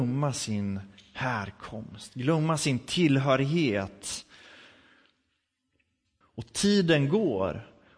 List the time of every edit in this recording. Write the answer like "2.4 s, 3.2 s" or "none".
6.2 s

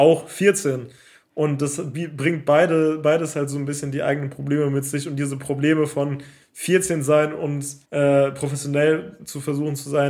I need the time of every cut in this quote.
7.8 s

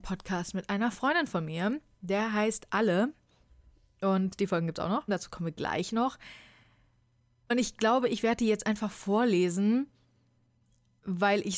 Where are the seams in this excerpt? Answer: 5.1 s

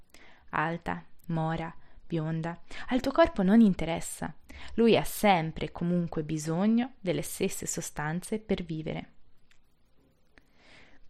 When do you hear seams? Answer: 1.2 s

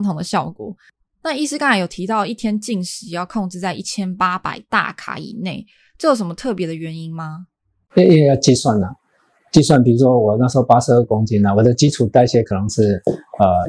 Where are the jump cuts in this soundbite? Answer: none

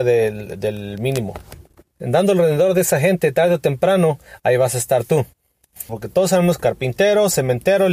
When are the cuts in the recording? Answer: 1.9 s, 5.9 s

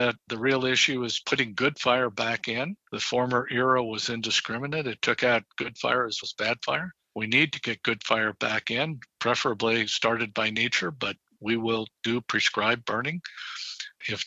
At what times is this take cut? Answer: 6.2 s

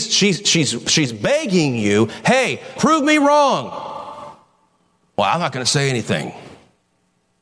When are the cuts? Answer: 2.8 s

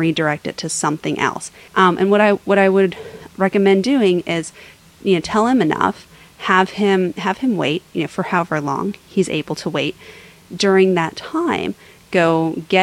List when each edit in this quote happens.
1.7 s

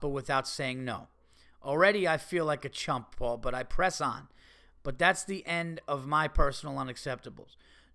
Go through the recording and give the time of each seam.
4.8 s

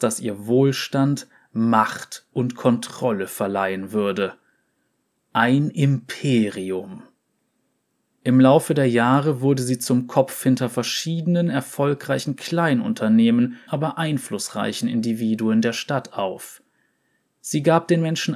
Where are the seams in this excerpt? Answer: 13.7 s

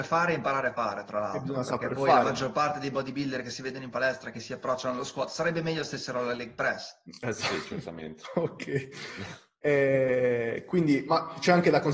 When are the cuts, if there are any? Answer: none

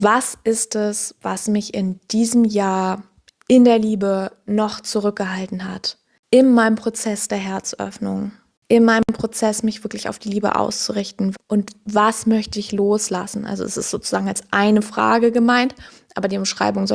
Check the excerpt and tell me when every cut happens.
11.3 s

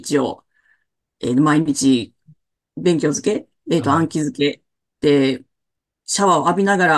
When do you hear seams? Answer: none

